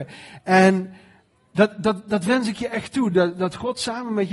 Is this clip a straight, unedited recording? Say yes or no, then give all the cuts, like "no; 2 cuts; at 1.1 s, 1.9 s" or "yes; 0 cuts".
yes; 0 cuts